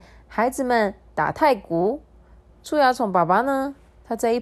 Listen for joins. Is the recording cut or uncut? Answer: cut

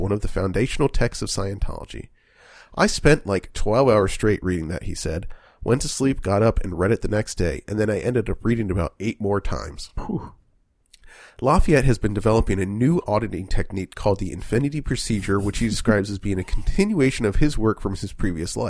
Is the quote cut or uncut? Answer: uncut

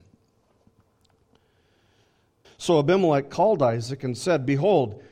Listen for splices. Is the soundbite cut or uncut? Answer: cut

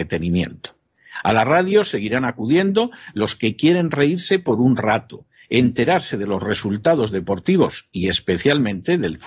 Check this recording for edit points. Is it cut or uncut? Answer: uncut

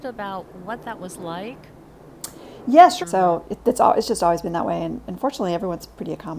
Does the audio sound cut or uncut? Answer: cut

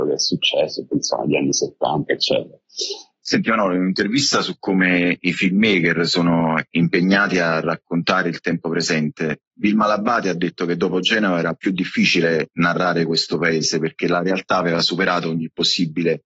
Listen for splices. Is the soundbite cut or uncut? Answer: cut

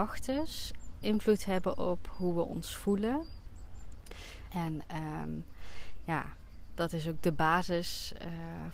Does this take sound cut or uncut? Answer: cut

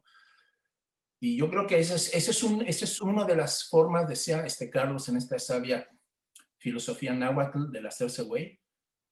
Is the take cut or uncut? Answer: cut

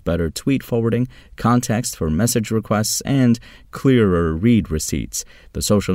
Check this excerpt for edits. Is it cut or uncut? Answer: uncut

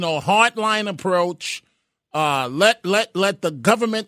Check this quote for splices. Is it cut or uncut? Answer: uncut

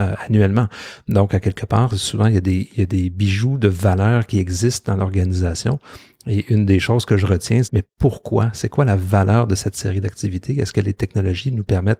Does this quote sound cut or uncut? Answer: cut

